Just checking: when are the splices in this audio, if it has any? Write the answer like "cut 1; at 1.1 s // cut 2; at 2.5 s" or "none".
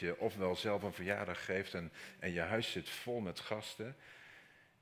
none